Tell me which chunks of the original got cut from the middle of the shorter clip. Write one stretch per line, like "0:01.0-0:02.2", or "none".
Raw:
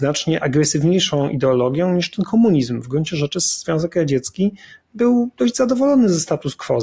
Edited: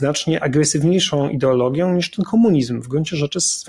none